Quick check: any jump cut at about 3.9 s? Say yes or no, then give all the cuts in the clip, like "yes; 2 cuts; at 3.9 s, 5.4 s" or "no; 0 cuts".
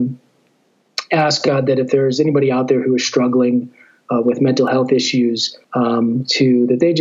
no; 1 cut; at 5.6 s